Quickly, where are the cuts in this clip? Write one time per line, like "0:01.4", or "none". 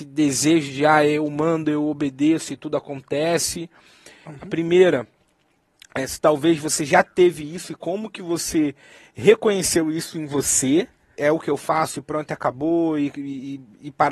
0:04.3
0:11.2

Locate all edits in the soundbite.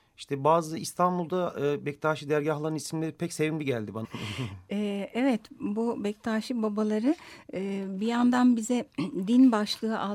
0:04.0

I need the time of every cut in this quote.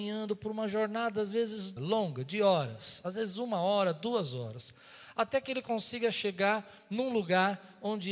0:01.8

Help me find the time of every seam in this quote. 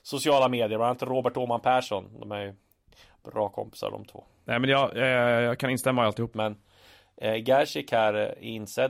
0:06.3

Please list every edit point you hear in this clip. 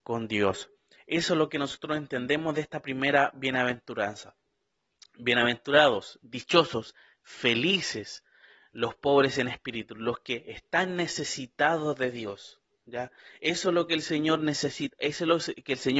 none

